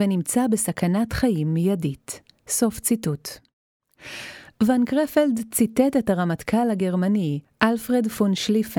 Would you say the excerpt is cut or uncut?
uncut